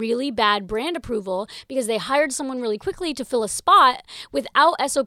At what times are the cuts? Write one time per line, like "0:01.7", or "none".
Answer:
none